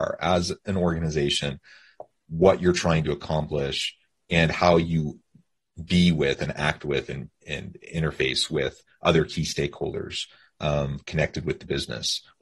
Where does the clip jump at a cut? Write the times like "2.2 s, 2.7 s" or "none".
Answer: none